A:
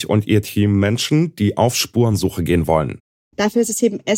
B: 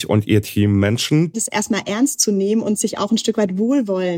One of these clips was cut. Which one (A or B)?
B